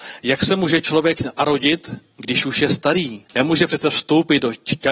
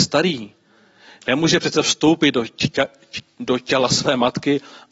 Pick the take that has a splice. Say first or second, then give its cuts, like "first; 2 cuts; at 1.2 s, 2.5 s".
first; 1 cut; at 3.3 s